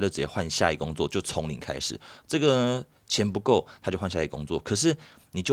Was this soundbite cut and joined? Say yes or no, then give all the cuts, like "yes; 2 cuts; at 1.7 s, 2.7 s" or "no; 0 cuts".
no; 0 cuts